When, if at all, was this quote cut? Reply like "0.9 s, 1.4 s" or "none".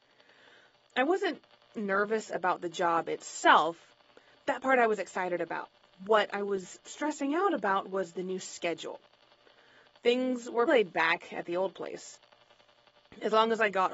10.7 s